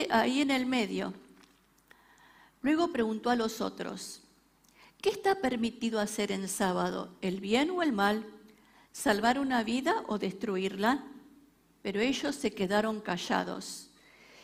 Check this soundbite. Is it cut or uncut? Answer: uncut